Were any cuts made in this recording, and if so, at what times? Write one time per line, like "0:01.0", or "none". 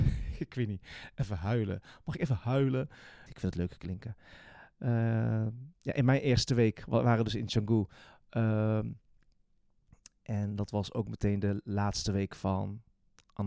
0:03.3